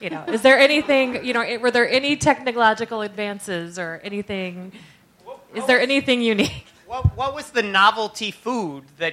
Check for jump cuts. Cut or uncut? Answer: uncut